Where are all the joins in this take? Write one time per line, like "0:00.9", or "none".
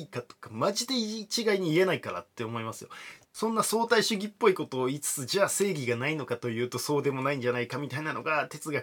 0:03.2